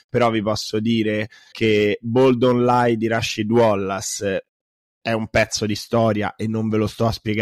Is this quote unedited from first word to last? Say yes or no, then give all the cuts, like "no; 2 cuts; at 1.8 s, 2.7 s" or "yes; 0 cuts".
no; 1 cut; at 1.5 s